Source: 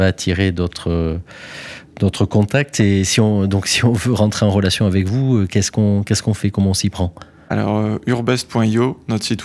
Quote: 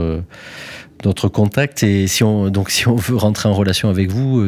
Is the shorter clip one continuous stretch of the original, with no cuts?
yes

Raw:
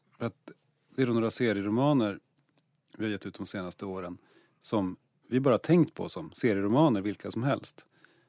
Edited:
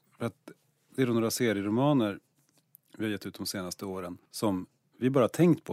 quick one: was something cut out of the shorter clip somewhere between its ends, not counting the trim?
yes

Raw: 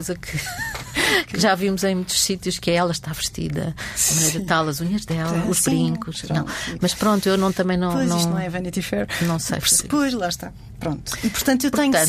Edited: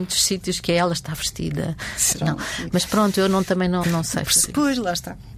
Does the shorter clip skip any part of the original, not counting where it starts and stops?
yes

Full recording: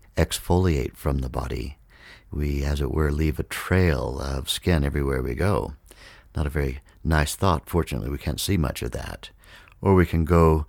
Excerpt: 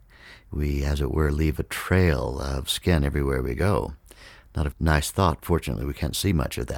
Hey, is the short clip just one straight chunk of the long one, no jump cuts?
no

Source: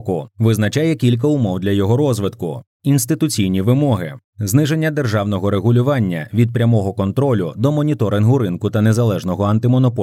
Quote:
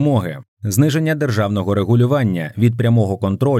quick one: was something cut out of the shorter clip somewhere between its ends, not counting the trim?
no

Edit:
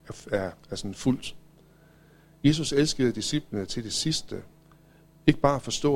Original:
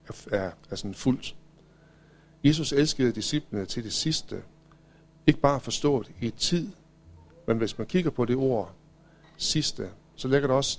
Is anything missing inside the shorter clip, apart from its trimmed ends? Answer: no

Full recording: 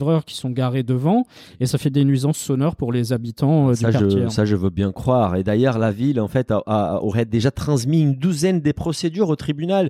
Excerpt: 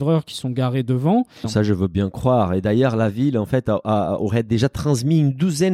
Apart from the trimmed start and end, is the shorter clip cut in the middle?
yes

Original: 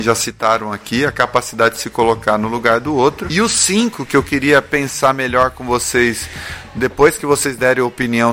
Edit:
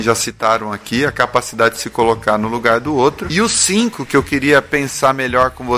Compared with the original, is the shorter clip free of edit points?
yes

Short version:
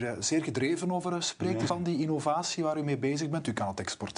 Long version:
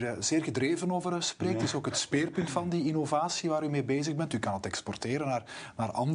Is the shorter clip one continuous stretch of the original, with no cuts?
no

